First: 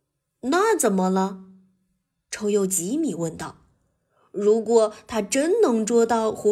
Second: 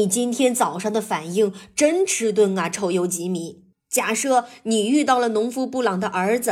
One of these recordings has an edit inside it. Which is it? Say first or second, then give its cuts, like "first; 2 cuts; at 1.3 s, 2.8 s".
second; 1 cut; at 3.7 s